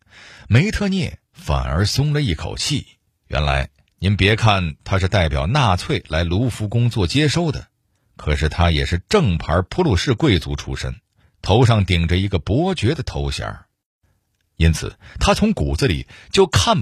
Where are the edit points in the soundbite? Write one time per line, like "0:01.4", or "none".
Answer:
0:03.2